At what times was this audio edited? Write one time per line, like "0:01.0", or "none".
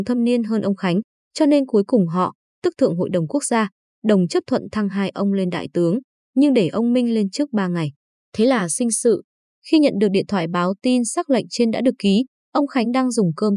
none